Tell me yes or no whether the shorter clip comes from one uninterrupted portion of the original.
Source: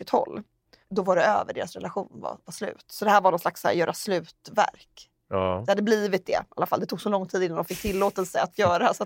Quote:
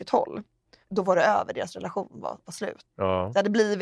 no